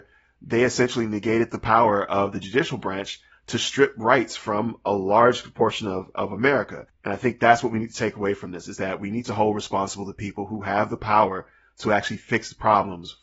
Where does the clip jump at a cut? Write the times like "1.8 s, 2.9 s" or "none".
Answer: 6.9 s

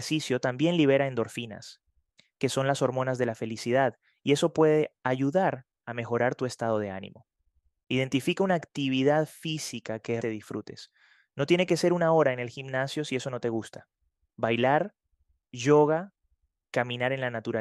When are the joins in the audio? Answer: 10.2 s

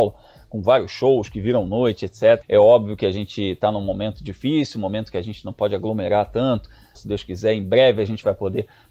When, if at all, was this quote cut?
2.4 s, 6.9 s

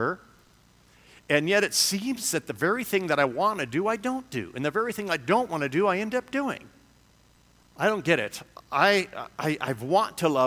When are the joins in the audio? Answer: 7.6 s

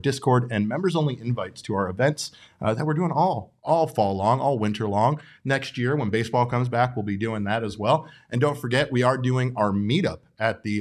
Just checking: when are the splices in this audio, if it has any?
none

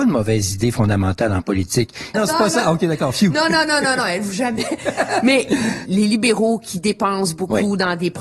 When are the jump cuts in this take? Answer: 2.1 s

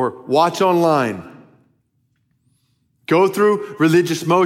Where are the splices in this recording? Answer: none

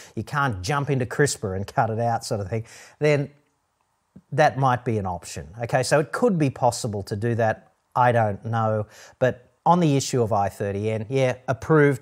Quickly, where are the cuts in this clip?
9.6 s

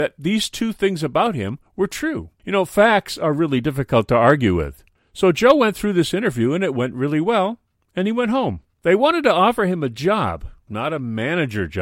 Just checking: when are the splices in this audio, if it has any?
8.7 s, 10.7 s

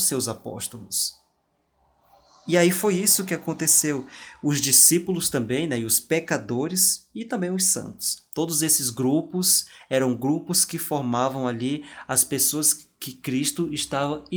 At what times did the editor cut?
none

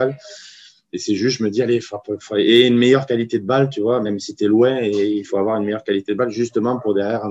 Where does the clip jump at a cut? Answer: none

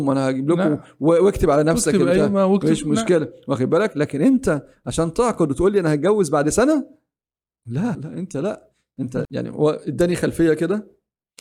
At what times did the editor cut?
7.9 s, 9.2 s

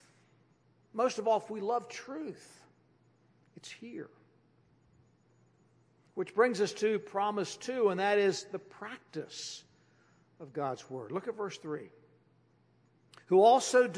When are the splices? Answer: none

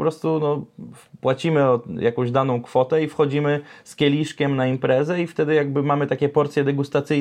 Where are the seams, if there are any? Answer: none

